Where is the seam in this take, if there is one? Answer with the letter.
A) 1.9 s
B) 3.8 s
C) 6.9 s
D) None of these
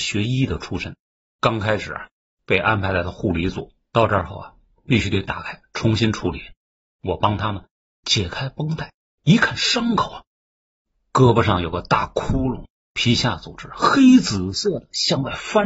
B